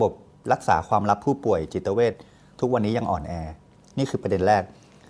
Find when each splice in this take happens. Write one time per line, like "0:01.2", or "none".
none